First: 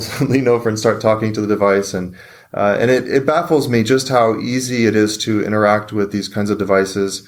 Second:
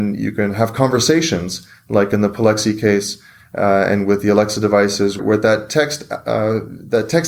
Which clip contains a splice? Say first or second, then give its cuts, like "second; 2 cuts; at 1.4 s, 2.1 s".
second; 1 cut; at 5.2 s